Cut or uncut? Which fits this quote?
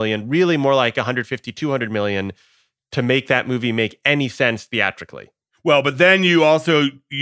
uncut